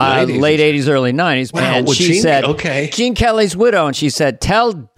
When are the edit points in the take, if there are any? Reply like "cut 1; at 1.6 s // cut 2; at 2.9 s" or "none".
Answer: cut 1; at 1.5 s